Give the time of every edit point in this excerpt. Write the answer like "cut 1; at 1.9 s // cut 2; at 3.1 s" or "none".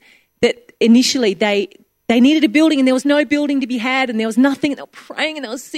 none